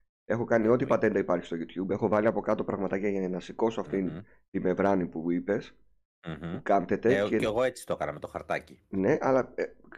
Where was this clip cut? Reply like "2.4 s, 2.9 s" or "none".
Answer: none